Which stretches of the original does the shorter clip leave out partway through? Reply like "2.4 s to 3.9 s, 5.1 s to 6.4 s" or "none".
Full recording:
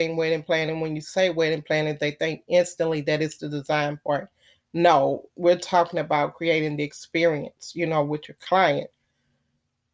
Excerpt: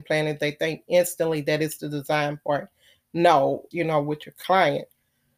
5.3 s to 7.7 s